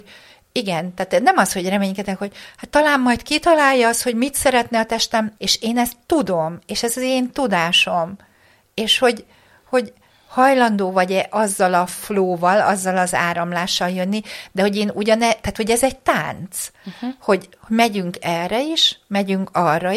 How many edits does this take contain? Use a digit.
1